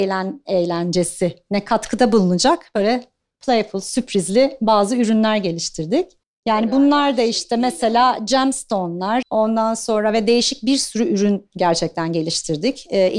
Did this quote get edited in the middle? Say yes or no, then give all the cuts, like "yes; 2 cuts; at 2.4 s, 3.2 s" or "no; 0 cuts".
yes; 1 cut; at 9.2 s